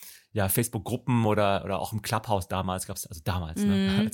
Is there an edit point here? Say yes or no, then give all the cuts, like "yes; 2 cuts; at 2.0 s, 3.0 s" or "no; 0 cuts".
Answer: no; 0 cuts